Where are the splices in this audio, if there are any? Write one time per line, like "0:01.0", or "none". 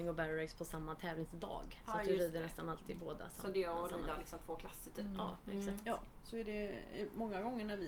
none